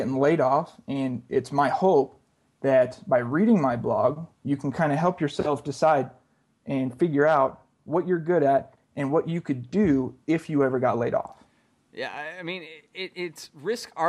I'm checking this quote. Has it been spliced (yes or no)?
no